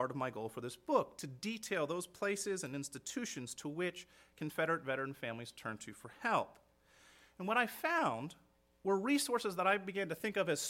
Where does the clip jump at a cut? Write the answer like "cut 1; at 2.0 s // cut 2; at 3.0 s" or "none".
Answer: none